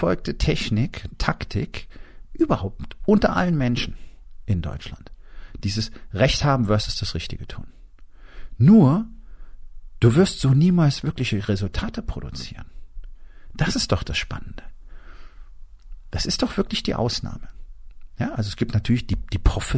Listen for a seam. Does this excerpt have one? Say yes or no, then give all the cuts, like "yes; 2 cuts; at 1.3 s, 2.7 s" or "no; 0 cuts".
no; 0 cuts